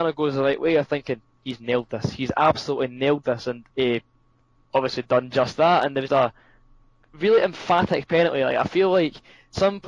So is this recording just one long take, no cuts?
no; 2 cuts; at 3.7 s, 6.1 s

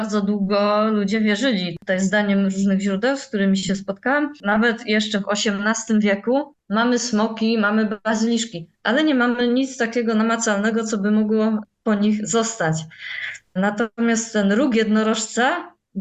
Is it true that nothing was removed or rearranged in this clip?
yes; 0 cuts

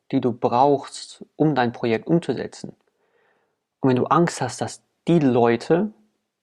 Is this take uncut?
yes; 0 cuts

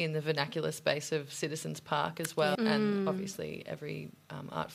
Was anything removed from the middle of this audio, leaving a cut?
yes; 1 cut; at 2.6 s

